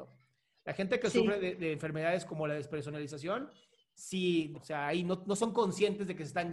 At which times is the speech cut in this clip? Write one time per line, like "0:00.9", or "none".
0:04.5